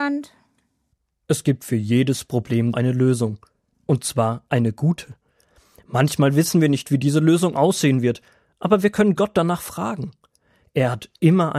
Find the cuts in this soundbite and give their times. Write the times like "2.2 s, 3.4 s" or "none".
2.7 s